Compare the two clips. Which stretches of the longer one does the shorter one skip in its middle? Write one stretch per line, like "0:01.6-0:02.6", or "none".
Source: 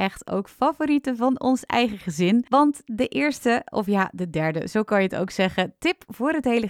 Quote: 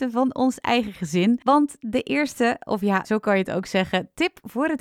0:04.1-0:04.7